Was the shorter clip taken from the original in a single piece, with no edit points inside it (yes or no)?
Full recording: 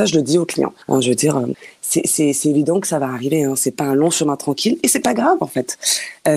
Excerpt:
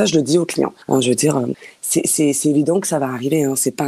yes